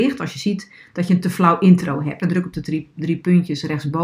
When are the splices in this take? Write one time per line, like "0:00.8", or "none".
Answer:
0:02.2